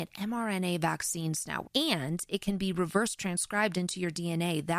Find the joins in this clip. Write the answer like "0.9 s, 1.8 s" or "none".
1.6 s